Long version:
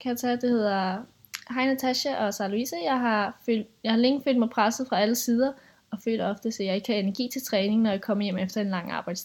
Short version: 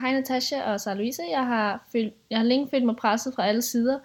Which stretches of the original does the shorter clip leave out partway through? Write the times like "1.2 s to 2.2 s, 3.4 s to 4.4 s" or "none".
none